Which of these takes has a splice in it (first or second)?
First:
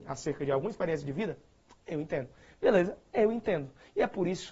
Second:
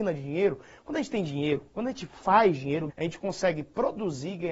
second